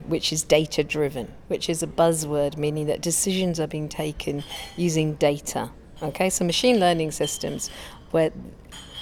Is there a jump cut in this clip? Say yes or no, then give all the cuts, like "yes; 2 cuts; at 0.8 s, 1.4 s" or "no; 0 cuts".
no; 0 cuts